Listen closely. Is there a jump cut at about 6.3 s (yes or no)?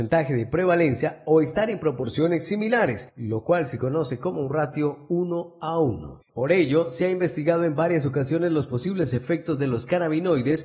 yes